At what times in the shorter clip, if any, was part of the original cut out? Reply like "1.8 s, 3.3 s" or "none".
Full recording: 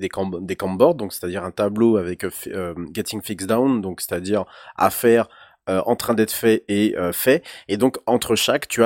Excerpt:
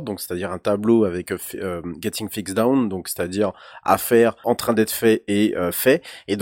4.4 s

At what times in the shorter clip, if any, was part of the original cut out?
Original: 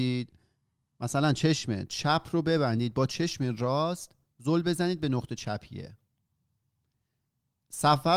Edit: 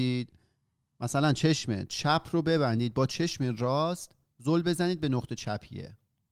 none

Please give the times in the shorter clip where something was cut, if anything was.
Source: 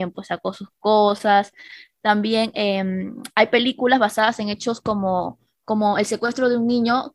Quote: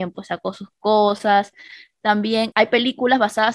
2.5 s

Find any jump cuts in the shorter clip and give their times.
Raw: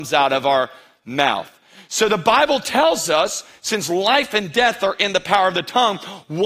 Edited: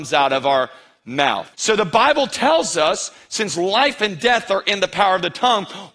1.5 s

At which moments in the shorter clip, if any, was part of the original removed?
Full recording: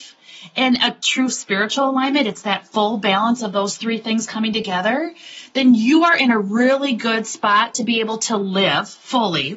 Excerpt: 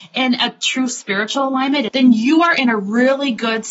1.9 s

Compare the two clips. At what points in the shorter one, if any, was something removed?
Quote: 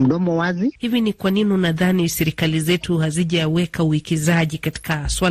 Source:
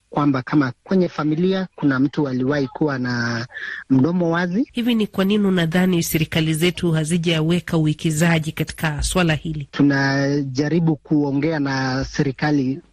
none

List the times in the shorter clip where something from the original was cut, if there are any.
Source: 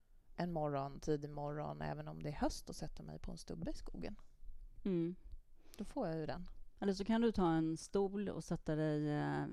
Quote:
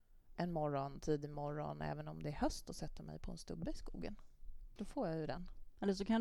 4.8 s

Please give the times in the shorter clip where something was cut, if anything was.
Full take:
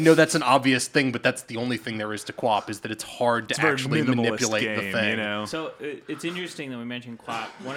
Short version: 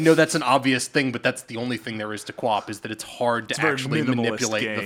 none

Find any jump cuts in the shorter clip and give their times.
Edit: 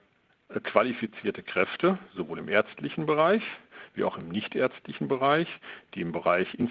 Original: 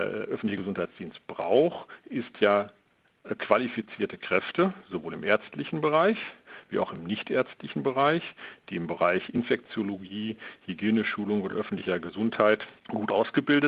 none

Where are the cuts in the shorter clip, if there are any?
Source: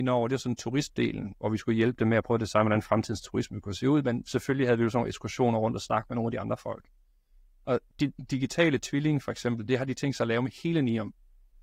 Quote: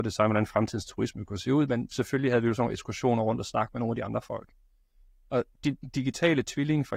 none

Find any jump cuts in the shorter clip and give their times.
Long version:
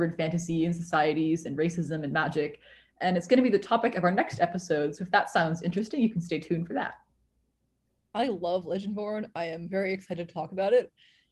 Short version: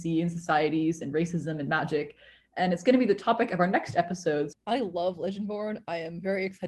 4.5 s

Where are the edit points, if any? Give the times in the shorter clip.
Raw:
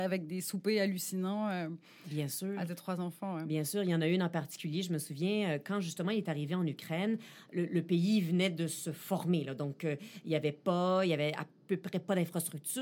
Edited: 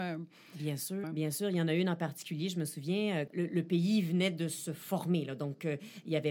1.0 s, 3.3 s

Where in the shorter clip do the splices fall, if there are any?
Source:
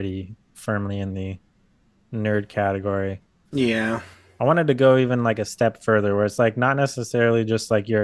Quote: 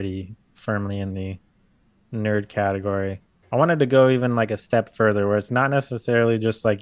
3.4 s, 5.5 s

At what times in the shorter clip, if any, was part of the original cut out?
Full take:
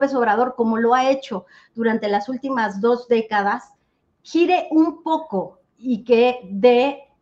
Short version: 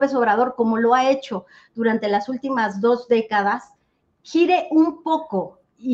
none

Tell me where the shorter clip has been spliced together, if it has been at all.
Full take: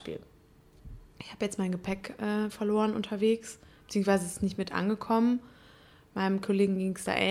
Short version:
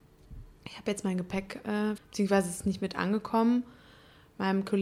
2.0 s

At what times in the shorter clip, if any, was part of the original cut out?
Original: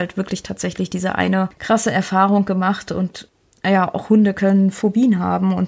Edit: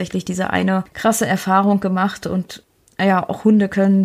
none

